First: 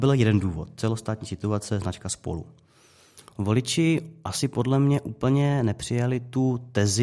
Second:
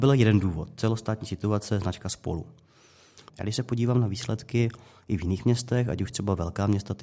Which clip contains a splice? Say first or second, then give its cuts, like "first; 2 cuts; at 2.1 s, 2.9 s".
second; 1 cut; at 3.3 s